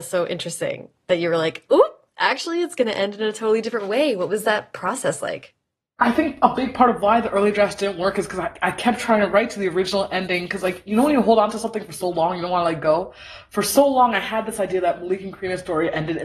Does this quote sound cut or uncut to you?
uncut